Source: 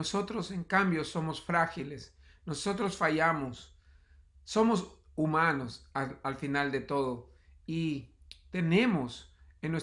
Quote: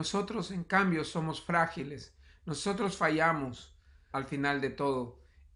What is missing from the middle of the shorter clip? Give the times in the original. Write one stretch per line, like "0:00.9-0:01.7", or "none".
0:04.1-0:06.2